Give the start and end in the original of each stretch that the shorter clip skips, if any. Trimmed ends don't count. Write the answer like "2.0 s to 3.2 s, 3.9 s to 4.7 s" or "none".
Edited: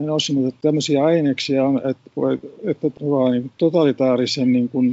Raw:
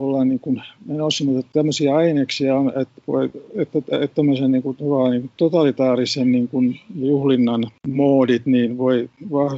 3.9 s to 4.8 s